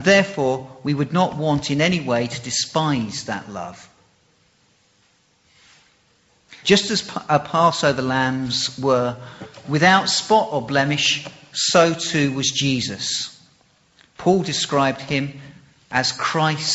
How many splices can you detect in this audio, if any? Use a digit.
1